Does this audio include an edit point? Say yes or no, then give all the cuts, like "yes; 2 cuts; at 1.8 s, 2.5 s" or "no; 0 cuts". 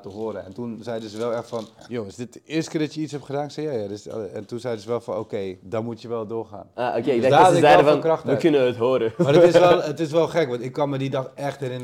no; 0 cuts